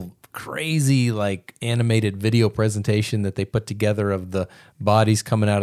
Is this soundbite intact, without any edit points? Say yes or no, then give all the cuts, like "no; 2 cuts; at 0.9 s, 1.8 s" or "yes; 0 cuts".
yes; 0 cuts